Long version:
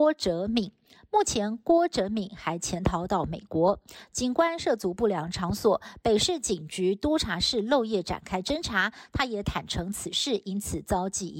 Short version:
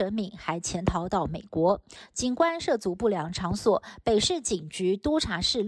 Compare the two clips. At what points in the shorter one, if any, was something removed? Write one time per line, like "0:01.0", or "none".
none